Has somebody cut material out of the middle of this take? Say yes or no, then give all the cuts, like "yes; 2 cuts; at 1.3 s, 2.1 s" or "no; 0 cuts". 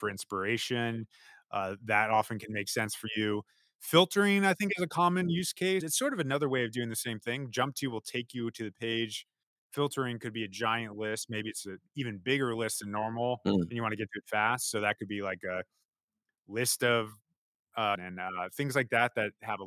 yes; 2 cuts; at 5.8 s, 18.0 s